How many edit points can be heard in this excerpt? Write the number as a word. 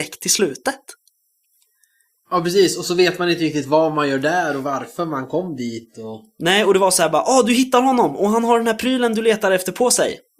zero